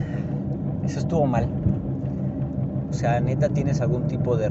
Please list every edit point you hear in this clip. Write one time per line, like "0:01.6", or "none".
0:02.9

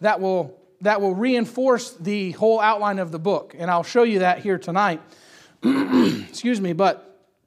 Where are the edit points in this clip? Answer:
none

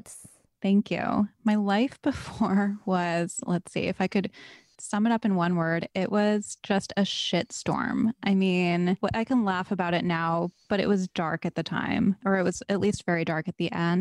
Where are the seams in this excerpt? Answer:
none

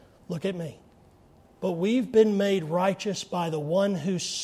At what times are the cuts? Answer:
0:01.4

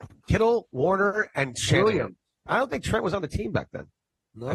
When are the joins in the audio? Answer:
0:02.4

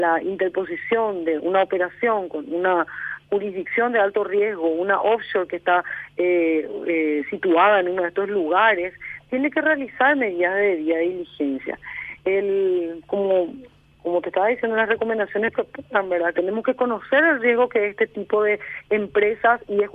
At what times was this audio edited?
0:16.3

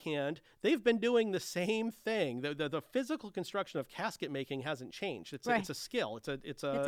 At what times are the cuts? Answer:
none

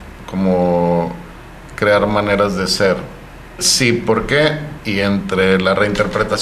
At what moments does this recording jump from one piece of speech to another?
0:03.6
0:04.8

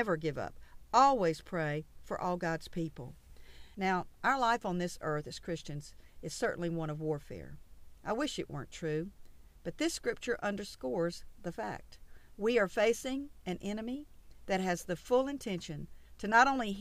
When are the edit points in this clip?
0:03.7

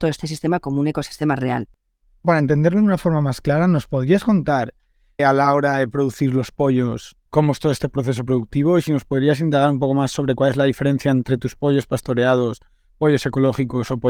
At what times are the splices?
0:05.2
0:07.3

